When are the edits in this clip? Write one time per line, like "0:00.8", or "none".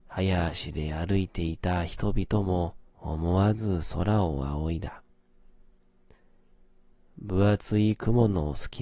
0:02.9